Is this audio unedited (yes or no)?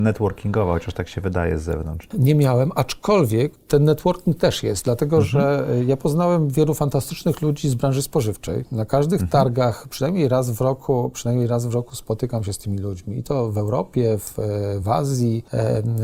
yes